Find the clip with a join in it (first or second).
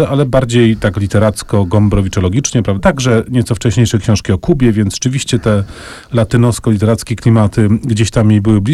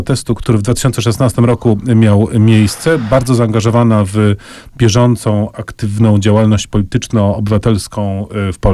first